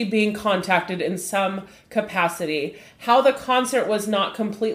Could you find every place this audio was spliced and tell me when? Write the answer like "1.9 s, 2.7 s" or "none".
none